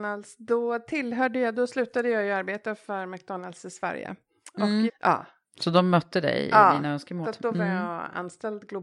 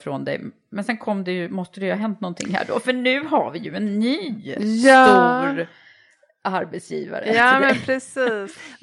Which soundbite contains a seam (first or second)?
first